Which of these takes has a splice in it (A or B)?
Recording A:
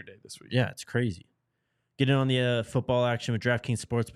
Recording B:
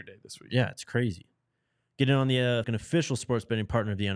B